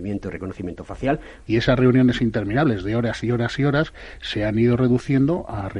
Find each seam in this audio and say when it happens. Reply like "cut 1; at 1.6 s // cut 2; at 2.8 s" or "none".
cut 1; at 1.5 s

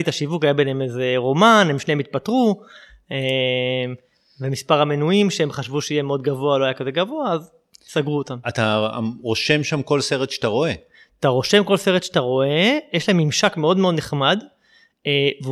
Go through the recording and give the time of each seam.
cut 1; at 8.4 s

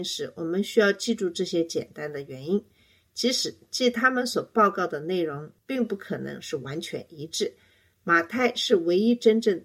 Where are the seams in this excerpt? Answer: none

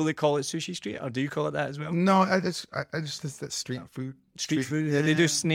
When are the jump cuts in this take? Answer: none

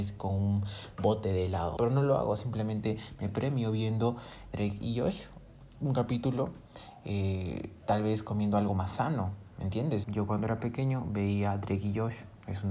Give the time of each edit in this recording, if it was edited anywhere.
cut 1; at 1.8 s // cut 2; at 10.0 s

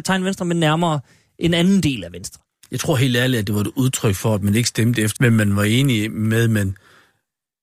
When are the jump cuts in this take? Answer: cut 1; at 5.2 s

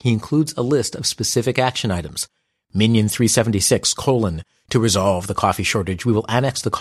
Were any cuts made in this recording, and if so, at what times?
none

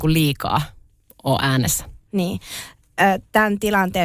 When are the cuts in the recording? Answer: none

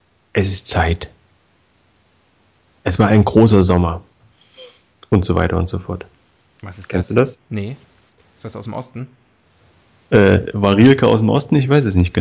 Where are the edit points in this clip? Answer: none

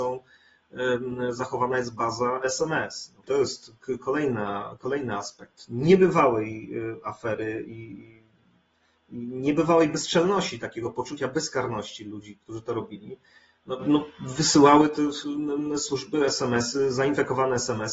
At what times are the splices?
cut 1; at 3.2 s

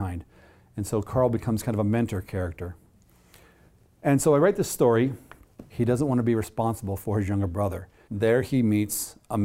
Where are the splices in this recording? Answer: cut 1; at 5.7 s // cut 2; at 8.1 s

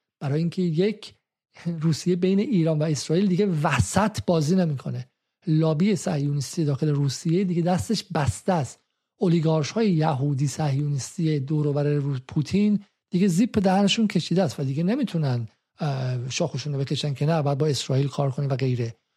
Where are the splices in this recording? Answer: none

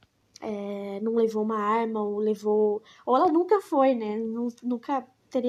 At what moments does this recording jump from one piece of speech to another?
none

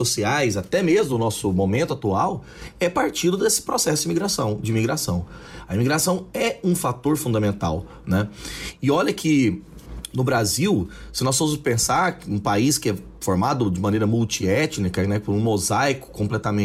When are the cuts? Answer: none

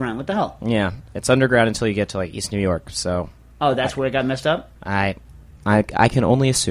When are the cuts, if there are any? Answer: none

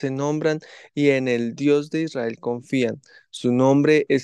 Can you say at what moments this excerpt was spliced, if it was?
none

